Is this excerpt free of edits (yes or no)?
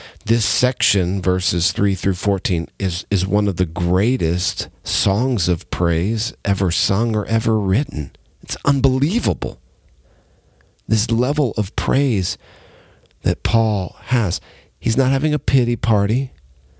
yes